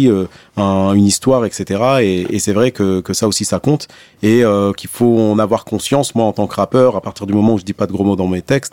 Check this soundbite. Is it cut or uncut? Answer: uncut